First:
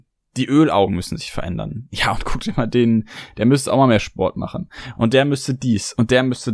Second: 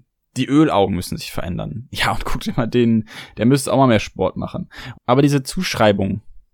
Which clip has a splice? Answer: second; 1 cut; at 4.9 s

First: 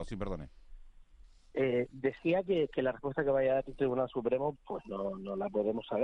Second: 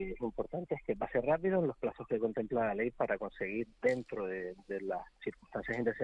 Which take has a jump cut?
first; 1 cut; at 4.5 s

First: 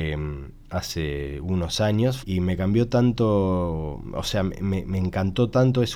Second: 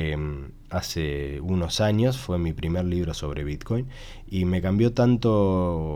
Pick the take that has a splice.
first; 1 cut; at 2.2 s

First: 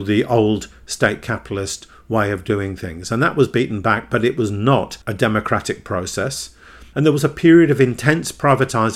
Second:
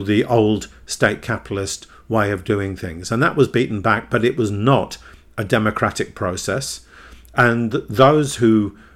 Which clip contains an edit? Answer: first; 2 cuts; at 5.0 s, 6.9 s

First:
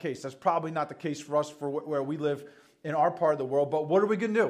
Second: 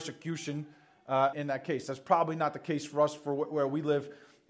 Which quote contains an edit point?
second; 1 cut; at 1.3 s

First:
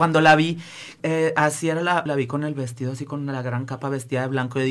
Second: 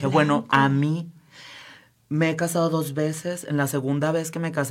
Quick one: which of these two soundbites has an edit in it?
first; 2 cuts; at 1.0 s, 2.1 s

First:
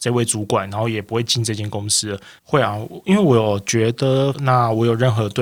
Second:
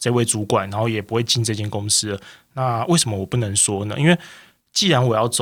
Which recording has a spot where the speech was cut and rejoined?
first; 2 cuts; at 2.4 s, 4.3 s

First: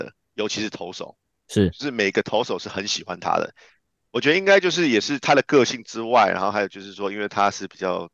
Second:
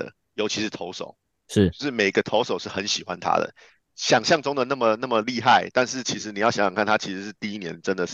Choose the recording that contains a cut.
second; 1 cut; at 3.8 s

